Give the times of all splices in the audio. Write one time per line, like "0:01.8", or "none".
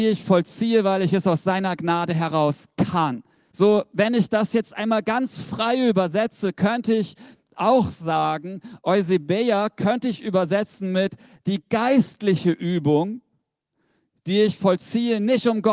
0:03.5